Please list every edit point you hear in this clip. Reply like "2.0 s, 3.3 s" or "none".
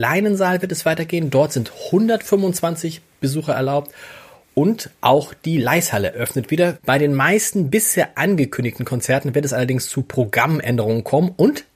6.8 s